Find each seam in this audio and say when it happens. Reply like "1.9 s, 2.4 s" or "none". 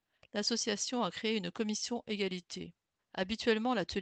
3.0 s